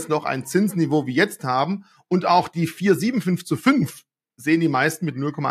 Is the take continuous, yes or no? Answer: yes